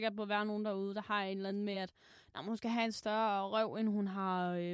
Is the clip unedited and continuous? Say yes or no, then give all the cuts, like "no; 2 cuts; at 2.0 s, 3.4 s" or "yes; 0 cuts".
yes; 0 cuts